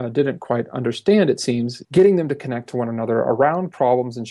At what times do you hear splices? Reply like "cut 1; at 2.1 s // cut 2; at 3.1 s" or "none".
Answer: cut 1; at 1.8 s